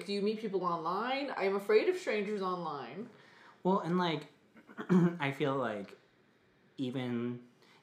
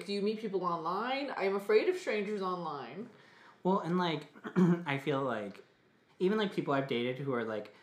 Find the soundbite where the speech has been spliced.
second; 2 cuts; at 4.3 s, 6.1 s

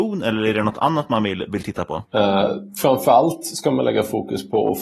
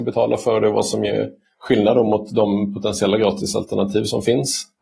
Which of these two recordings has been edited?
first; 1 cut; at 2.1 s

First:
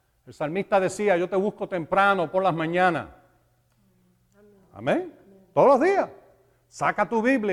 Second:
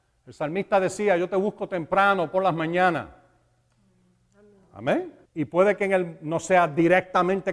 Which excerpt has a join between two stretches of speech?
second; 1 cut; at 5.2 s

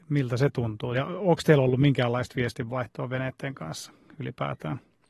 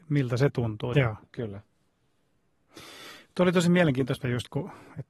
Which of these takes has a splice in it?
second; 2 cuts; at 0.9 s, 4.2 s

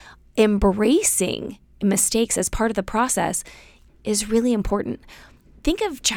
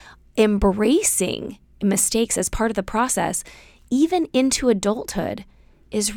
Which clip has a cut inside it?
first; 1 cut; at 3.9 s

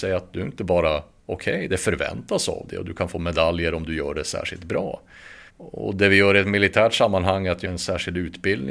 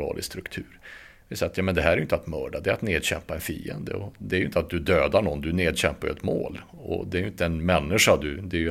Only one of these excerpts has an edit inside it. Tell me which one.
first; 2 cuts; at 5.5 s, 7.6 s

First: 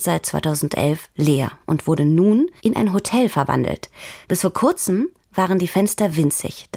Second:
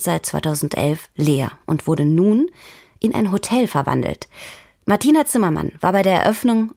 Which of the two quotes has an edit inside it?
first; 2 cuts; at 2.6 s, 4.2 s

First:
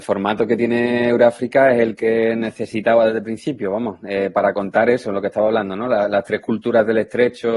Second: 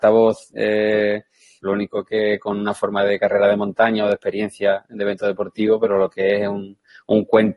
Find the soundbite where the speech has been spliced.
second; 1 cut; at 1.6 s

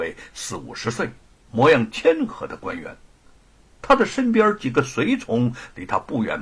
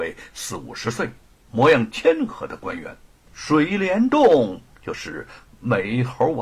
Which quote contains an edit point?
second; 1 cut; at 3.3 s

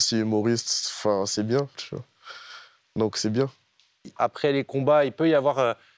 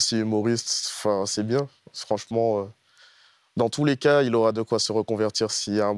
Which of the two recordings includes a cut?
first; 2 cuts; at 1.7 s, 4.2 s

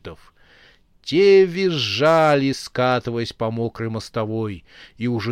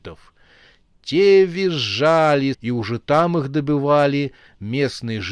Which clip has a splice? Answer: second; 1 cut; at 2.5 s

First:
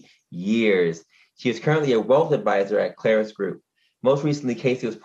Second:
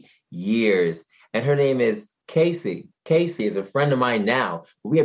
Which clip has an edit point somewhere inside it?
second; 2 cuts; at 1.2 s, 3.0 s

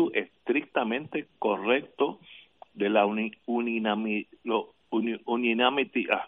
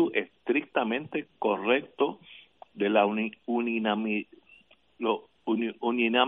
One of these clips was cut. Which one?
first; 1 cut; at 4.4 s

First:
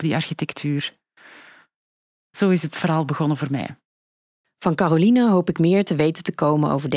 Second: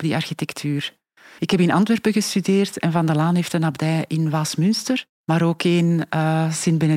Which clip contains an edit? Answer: second; 2 cuts; at 1.4 s, 5.1 s

